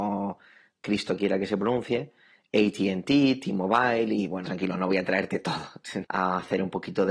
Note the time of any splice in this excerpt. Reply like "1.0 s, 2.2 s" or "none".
4.5 s, 6.0 s